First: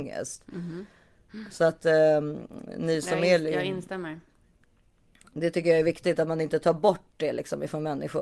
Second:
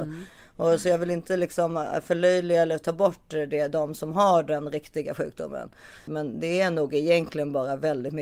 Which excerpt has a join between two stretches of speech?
second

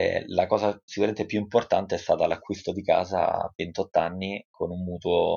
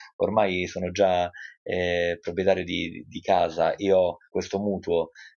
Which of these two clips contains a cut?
second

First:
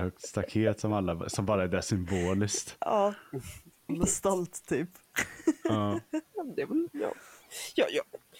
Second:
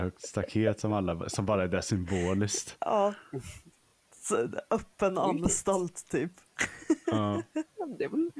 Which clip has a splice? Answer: first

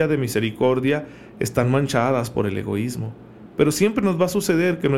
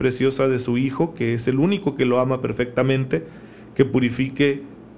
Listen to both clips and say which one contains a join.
first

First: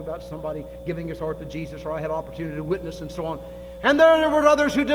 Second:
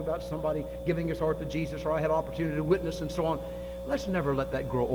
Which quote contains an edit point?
first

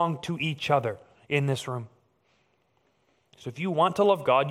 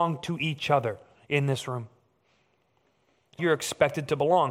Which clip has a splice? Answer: second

